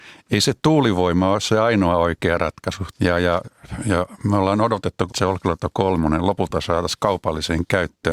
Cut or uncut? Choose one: cut